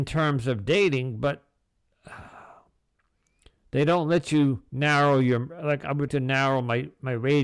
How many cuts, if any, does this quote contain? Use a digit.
1